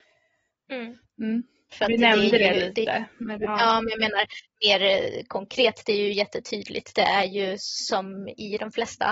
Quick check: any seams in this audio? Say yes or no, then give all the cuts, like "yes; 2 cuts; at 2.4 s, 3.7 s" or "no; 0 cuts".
yes; 1 cut; at 1.7 s